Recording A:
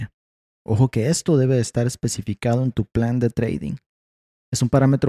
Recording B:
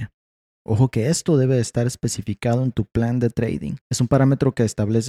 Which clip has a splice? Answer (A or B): B